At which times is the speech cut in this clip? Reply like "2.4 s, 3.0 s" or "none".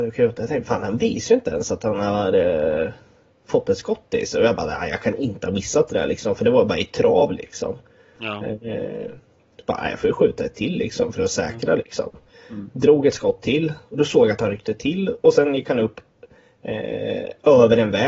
none